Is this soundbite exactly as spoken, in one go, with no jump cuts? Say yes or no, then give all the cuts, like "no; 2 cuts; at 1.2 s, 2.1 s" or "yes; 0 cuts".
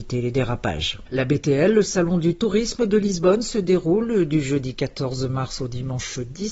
yes; 0 cuts